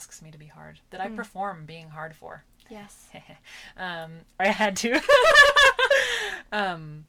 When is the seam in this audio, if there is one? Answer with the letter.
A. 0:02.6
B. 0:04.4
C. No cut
B